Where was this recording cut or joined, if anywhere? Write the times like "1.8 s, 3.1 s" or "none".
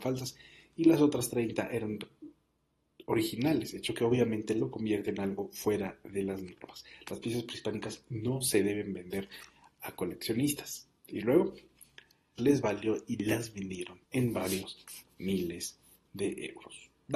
12.4 s, 14.0 s